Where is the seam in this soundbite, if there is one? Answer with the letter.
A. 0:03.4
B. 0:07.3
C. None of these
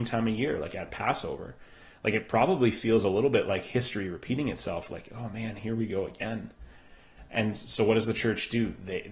C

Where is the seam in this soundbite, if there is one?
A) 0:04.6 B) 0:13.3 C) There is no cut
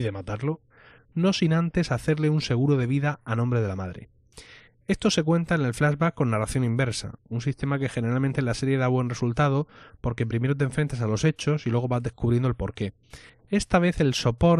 B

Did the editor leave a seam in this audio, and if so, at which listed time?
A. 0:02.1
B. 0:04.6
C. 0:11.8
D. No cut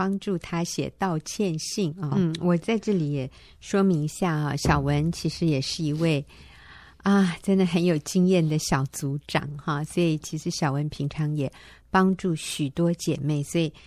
A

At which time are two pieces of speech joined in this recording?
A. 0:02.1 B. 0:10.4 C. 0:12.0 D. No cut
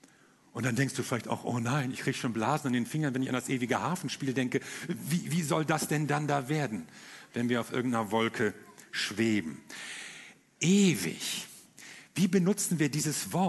D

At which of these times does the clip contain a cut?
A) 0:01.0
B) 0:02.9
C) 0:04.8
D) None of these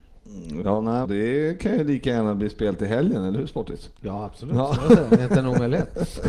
A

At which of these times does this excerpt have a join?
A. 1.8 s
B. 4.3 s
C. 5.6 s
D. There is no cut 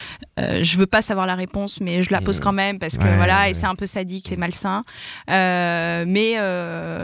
B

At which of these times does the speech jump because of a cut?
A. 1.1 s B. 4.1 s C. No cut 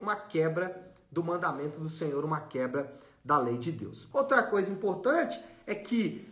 B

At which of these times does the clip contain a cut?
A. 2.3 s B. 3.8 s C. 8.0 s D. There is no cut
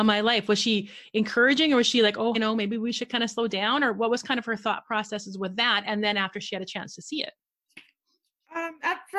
A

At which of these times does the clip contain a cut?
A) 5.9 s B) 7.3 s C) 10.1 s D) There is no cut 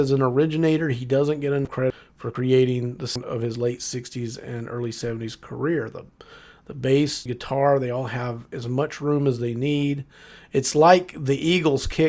B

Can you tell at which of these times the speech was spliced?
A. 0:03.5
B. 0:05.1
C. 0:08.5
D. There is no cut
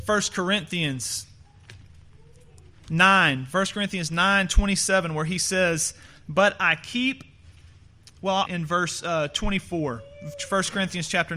C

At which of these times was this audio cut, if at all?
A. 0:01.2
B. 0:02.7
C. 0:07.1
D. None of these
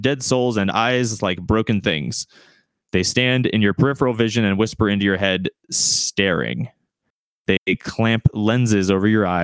D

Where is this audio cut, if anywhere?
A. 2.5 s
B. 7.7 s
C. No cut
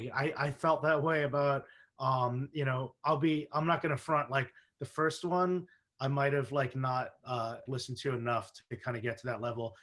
B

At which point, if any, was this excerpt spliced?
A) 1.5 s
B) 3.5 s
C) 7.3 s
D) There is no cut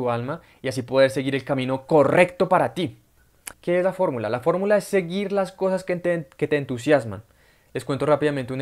B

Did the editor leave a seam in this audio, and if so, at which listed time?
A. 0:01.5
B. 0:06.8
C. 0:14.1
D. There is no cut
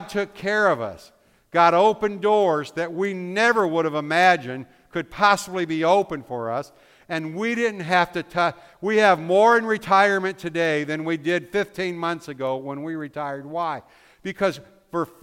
D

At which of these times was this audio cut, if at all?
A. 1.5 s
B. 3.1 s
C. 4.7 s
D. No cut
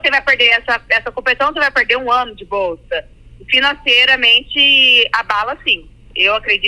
D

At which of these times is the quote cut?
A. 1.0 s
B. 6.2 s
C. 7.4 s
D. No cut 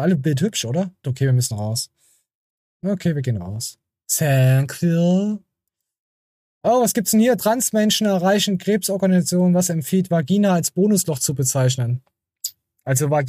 A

